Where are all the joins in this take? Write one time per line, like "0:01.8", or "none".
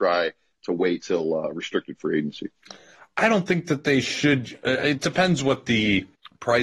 none